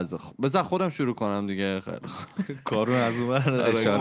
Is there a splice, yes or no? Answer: no